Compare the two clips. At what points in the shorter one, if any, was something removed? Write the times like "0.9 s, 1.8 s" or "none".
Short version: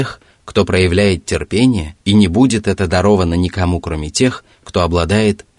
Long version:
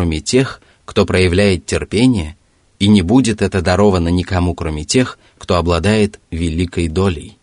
2.0 s

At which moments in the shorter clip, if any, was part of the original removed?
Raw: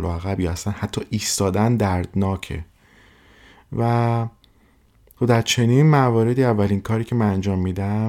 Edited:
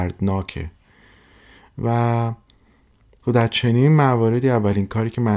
none

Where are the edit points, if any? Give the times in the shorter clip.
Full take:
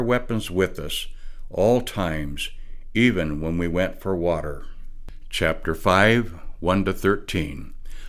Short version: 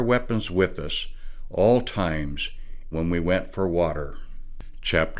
2.9 s

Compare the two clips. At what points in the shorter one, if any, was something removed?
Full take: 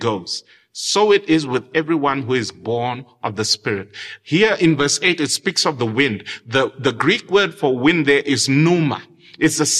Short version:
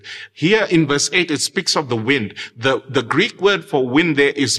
none

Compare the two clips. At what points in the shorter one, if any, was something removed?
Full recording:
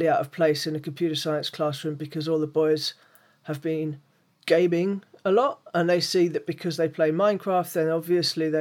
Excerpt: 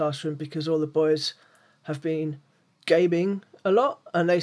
none

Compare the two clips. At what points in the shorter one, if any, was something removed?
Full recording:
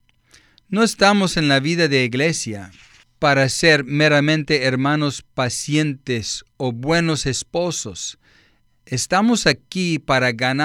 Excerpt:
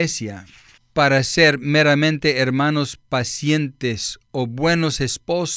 none

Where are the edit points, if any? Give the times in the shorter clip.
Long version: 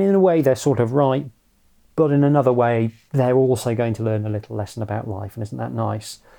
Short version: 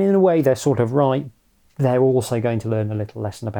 1.7 s

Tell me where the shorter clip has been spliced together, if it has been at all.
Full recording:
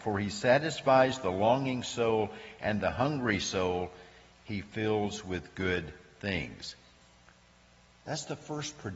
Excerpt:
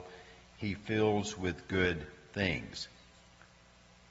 none

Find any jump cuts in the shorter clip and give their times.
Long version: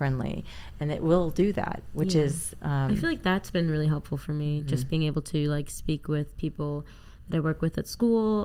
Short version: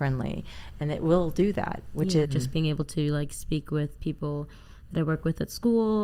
2.2 s

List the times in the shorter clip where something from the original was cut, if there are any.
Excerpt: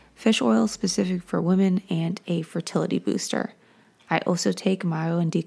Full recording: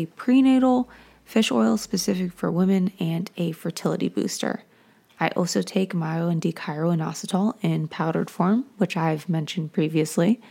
none

